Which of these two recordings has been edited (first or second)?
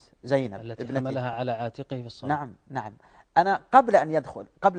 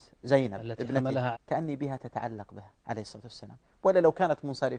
second